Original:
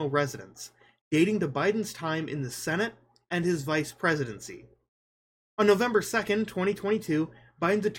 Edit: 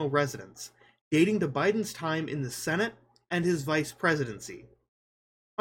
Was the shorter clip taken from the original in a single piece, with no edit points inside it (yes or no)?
yes